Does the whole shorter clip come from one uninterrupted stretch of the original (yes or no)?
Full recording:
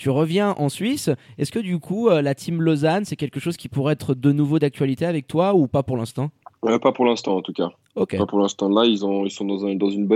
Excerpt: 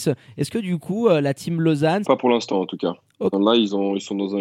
no